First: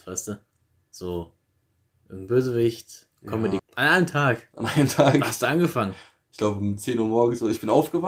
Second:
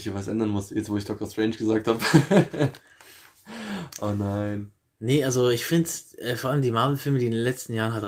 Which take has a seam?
first; 1 cut; at 3.6 s

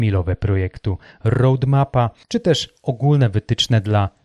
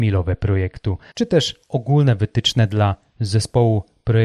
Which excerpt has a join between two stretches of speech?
second; 1 cut; at 1.1 s

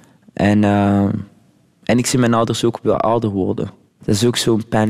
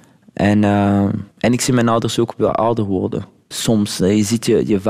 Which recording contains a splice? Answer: second; 2 cuts; at 1.3 s, 3.5 s

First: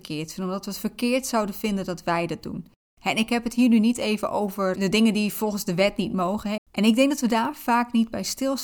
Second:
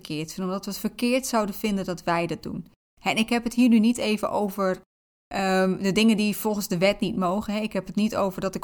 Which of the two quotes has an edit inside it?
first; 2 cuts; at 4.8 s, 6.6 s

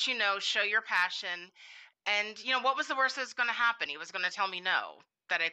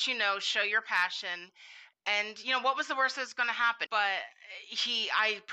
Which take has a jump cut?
second; 1 cut; at 3.9 s

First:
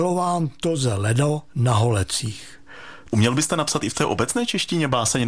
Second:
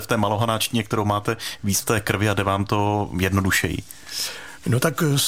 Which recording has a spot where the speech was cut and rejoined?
first; 2 cuts; at 1.5 s, 3.1 s

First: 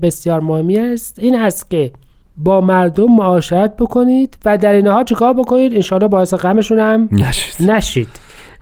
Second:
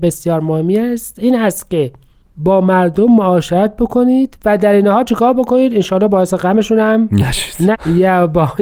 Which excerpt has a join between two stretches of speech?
second; 1 cut; at 7.7 s

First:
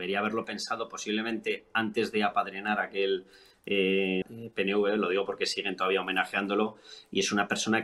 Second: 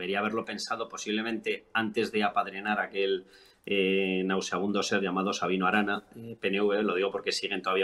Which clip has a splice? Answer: first; 1 cut; at 4.2 s

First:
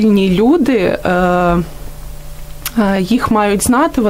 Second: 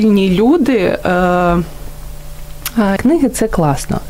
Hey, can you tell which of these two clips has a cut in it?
second; 1 cut; at 3.0 s

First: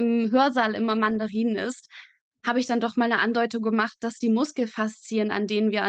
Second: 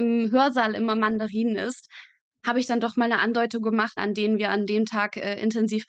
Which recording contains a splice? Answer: second; 1 cut; at 4.0 s

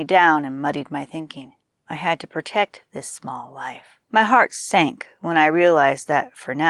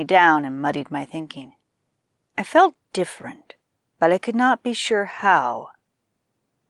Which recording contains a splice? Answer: first; 2 cuts; at 1.8 s, 4.0 s

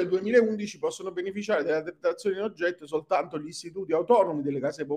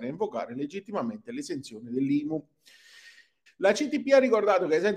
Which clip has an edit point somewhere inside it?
second; 1 cut; at 3.5 s

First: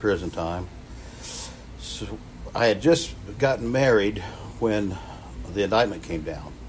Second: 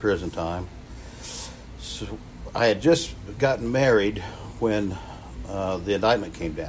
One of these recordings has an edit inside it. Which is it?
first; 1 cut; at 5.5 s

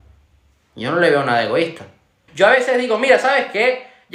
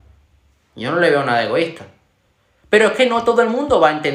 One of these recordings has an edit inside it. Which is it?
first; 1 cut; at 2.3 s

